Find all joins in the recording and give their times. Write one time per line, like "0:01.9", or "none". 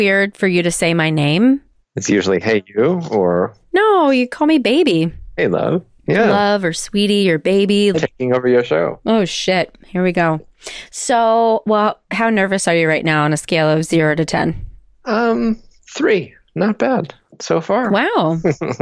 0:07.9